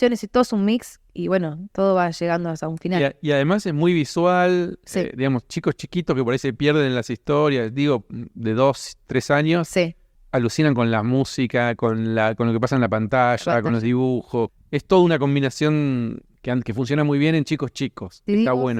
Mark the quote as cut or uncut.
uncut